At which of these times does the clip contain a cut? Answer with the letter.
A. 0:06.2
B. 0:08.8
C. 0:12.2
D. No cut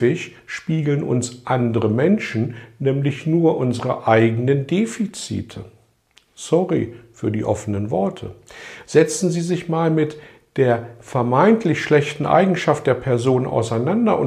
B